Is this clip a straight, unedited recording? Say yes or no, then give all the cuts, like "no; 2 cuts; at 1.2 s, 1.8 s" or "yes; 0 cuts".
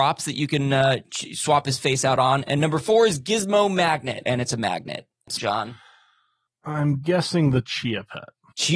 no; 2 cuts; at 4.2 s, 5.4 s